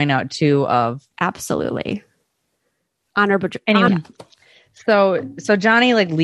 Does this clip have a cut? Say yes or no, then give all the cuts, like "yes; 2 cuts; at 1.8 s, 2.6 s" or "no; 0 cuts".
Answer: yes; 2 cuts; at 1.1 s, 3.9 s